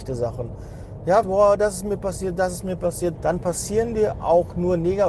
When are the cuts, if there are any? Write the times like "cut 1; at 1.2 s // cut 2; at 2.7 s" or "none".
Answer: cut 1; at 1.2 s // cut 2; at 3.1 s